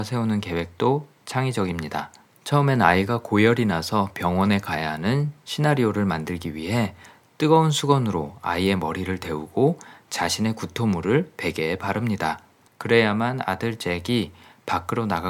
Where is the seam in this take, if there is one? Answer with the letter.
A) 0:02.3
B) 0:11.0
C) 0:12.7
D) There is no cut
C